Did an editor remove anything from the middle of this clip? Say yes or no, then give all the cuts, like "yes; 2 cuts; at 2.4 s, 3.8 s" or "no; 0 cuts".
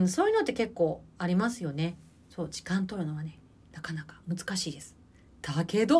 no; 0 cuts